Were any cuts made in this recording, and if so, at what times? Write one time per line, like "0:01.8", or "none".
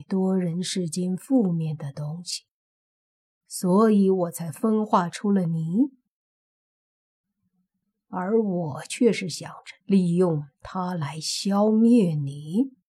0:07.2
0:09.8